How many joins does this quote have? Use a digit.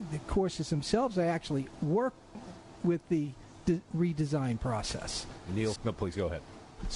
1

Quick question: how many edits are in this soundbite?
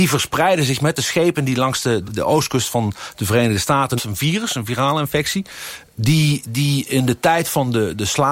2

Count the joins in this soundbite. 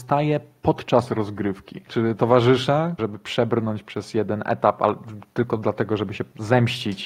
2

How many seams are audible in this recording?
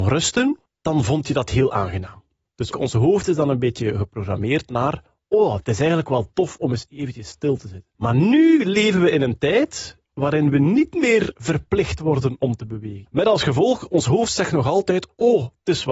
2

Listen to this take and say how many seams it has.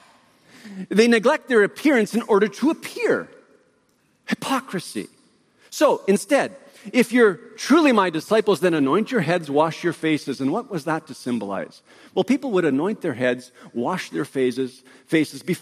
0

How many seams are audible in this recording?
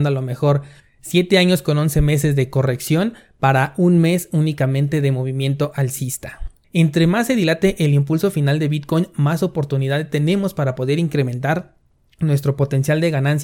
1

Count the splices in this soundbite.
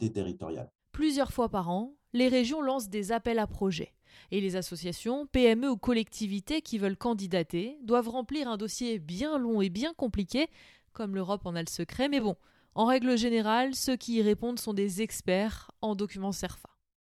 0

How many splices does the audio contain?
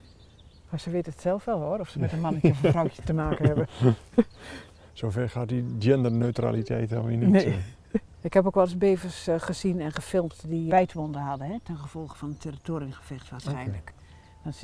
1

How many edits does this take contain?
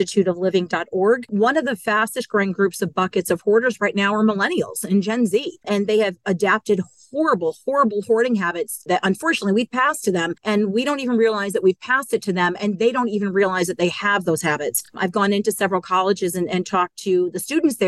0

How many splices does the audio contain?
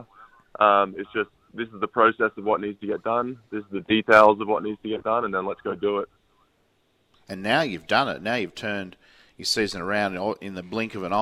0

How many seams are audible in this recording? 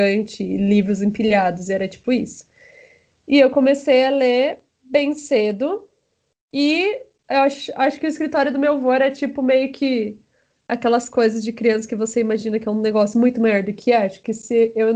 0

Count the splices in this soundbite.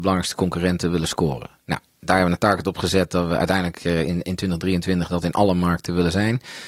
0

